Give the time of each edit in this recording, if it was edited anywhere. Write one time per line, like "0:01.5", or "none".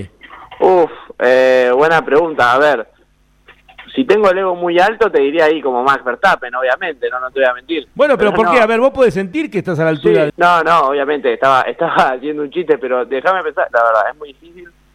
0:10.3
0:13.7